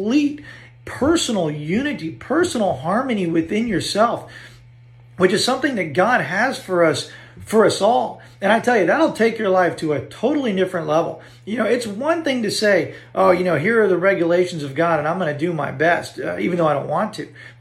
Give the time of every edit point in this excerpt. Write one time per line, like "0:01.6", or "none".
none